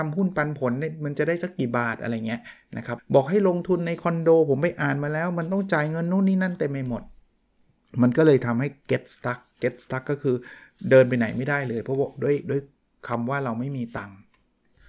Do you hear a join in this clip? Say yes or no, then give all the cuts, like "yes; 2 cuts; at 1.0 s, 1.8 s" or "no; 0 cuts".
yes; 1 cut; at 3.0 s